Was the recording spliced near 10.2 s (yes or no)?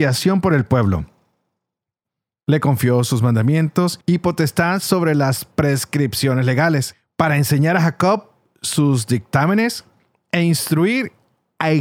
no